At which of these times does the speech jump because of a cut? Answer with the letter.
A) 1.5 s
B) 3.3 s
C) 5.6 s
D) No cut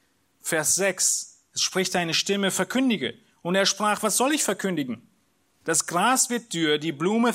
C